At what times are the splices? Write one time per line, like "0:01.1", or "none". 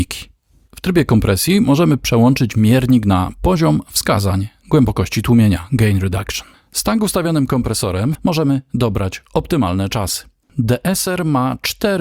0:08.2
0:10.4